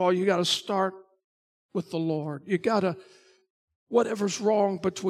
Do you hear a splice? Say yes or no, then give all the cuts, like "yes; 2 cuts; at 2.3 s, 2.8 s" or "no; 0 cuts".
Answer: no; 0 cuts